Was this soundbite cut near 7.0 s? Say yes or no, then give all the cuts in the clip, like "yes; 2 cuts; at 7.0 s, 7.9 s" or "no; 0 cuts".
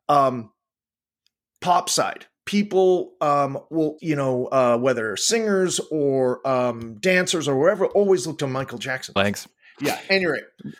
no; 2 cuts; at 4.0 s, 9.2 s